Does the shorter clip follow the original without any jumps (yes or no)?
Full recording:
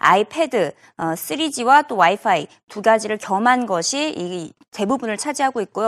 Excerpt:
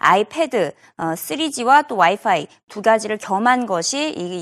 yes